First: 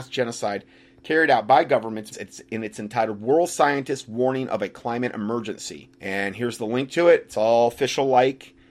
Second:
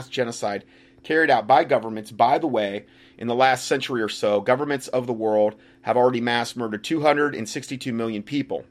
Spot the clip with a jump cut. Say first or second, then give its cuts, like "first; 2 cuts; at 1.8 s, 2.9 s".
first; 2 cuts; at 2.1 s, 5.9 s